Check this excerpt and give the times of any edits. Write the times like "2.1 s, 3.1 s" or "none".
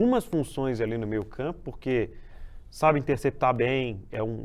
none